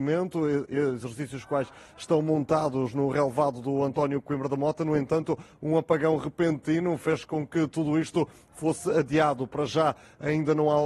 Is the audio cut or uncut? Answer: uncut